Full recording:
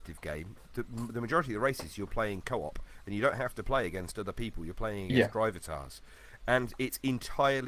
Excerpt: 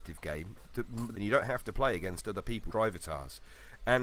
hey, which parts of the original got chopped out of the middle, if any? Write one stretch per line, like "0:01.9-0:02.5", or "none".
0:01.1-0:03.0
0:04.6-0:05.3